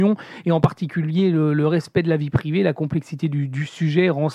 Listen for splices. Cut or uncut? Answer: uncut